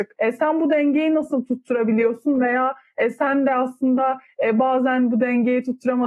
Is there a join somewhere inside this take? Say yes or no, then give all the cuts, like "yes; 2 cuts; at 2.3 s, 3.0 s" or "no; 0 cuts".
no; 0 cuts